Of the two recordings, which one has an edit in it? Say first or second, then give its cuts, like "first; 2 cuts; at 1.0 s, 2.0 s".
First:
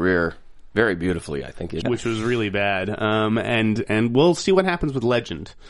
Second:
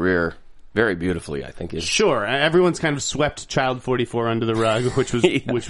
first; 1 cut; at 1.8 s